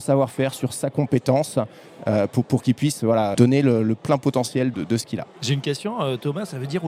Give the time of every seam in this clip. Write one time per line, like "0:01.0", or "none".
0:03.3
0:04.7